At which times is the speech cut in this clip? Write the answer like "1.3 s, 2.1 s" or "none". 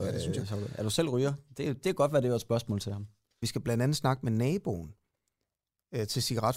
3.4 s